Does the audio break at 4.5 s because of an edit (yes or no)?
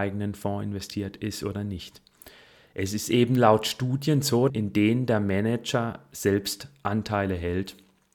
yes